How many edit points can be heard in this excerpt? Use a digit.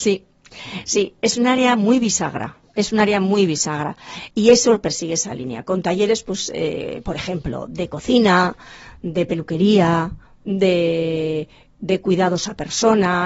1